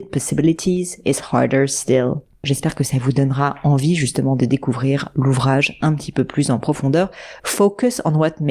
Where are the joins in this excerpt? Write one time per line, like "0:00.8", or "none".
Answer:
0:02.4
0:07.4